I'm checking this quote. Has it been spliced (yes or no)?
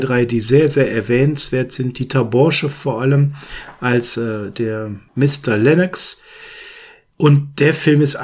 yes